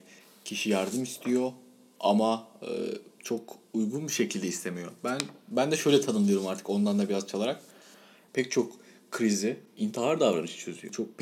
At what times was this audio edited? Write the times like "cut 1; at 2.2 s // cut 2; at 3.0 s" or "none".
cut 1; at 8.3 s